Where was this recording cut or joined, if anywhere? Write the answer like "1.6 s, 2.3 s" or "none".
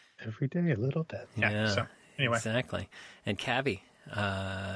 none